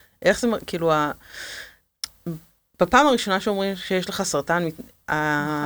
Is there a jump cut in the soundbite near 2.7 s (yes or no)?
no